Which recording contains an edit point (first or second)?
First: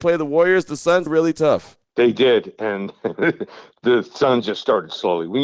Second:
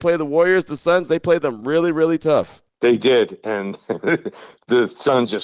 first